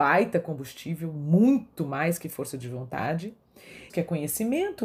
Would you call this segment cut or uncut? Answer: cut